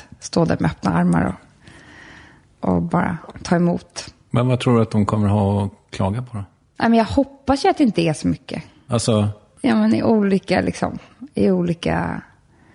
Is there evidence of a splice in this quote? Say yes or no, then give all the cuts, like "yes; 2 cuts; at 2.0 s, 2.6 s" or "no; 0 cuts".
yes; 1 cut; at 8.9 s